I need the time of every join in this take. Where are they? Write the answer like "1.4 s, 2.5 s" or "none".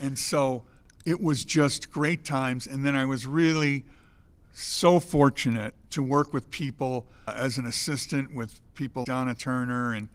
5.8 s, 9.0 s